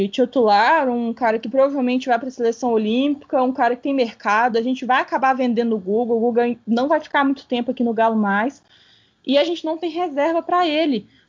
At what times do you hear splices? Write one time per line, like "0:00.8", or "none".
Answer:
none

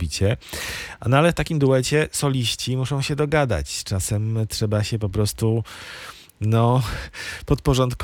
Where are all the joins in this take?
none

